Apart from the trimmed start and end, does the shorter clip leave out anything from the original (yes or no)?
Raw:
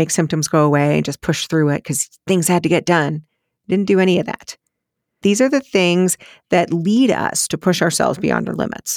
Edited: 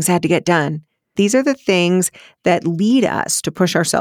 yes